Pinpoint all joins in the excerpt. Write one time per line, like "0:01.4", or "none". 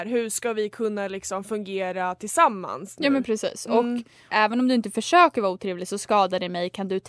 0:04.3